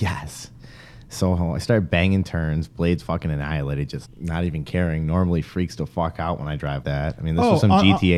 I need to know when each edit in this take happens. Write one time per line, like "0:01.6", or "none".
0:04.0
0:06.8